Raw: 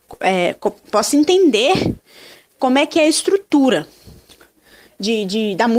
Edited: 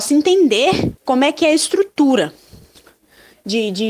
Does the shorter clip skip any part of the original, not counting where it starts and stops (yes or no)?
yes